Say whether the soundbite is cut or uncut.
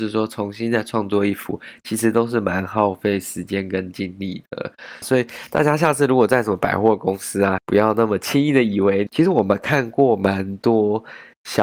cut